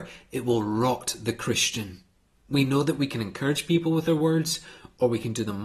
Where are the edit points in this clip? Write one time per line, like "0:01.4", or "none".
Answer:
0:02.3